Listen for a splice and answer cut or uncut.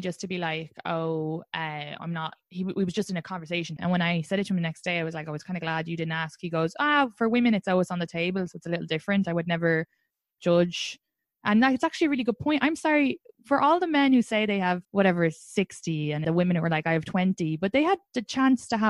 cut